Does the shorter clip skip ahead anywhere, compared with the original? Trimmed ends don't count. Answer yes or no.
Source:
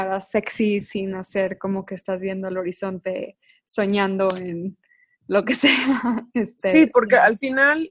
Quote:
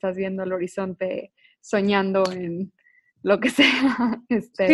no